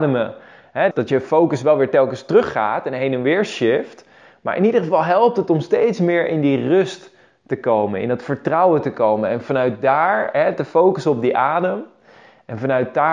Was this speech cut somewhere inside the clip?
yes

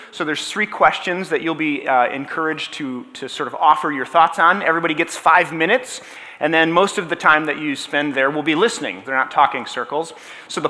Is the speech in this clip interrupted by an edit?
yes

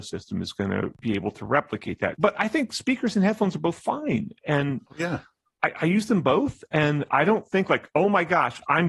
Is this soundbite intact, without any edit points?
yes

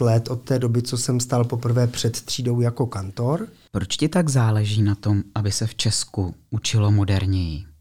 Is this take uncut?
no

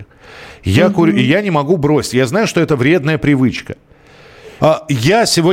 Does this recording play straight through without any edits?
no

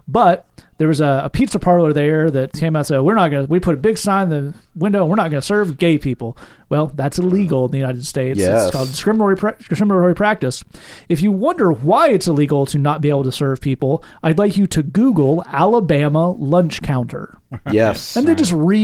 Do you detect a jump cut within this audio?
no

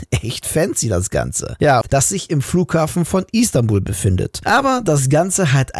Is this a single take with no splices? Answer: no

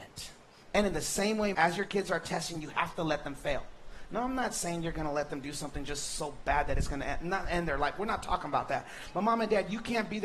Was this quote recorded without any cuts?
no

